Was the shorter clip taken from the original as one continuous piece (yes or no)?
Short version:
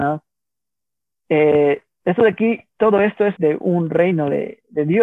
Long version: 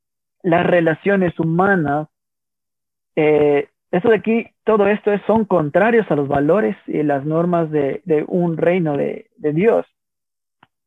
no